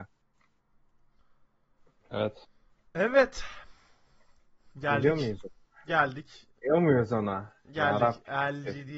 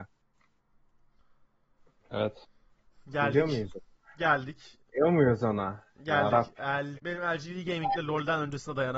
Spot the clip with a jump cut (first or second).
second